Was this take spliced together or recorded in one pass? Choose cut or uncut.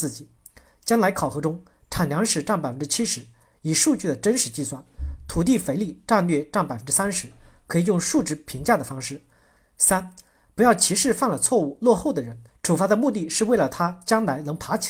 cut